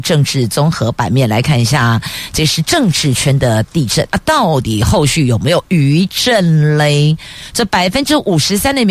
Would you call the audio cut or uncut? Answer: uncut